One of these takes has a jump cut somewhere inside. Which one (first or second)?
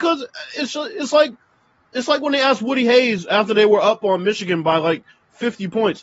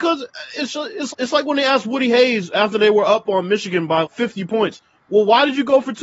second